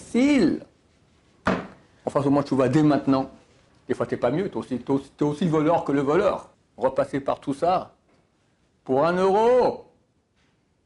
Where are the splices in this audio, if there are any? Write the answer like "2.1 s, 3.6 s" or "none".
2.0 s, 3.7 s, 6.5 s